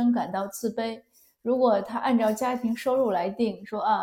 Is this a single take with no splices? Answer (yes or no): yes